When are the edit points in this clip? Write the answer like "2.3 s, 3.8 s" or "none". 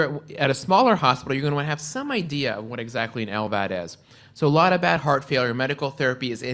none